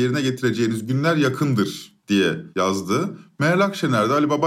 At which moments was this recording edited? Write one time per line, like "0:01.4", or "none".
none